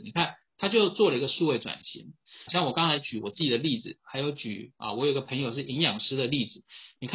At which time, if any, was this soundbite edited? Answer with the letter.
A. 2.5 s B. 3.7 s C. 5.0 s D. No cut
A